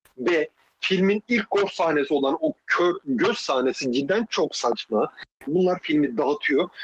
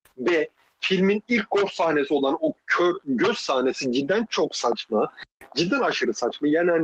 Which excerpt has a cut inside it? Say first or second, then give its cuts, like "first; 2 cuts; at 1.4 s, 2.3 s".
first; 1 cut; at 5.5 s